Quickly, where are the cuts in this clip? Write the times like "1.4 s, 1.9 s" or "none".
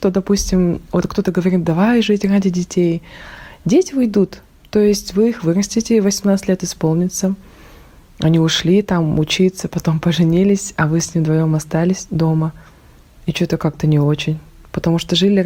none